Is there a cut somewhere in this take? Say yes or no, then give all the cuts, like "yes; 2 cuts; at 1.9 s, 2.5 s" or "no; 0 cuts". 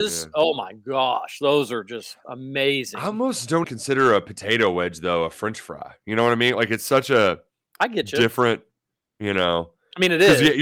yes; 1 cut; at 3.6 s